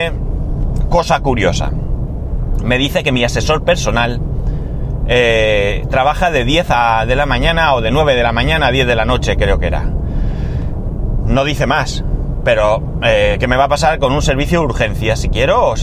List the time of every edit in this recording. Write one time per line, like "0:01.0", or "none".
none